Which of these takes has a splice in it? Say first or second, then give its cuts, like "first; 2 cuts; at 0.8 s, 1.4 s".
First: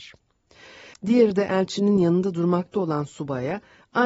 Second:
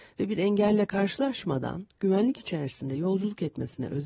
first; 1 cut; at 0.9 s